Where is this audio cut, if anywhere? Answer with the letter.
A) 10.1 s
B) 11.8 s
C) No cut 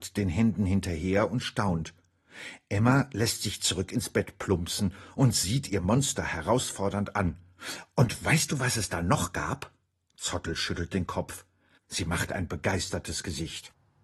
B